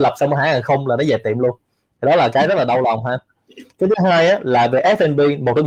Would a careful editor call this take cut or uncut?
uncut